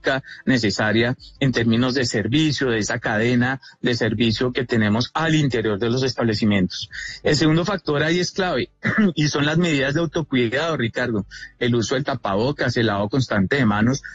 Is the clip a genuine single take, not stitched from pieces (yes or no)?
no